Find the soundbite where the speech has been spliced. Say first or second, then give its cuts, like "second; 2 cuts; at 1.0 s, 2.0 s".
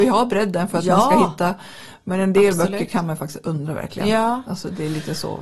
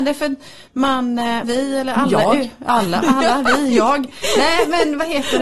second; 2 cuts; at 1.4 s, 3.0 s